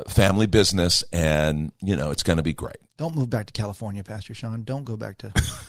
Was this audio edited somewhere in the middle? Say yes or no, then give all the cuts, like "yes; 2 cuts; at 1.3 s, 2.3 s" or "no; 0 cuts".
no; 0 cuts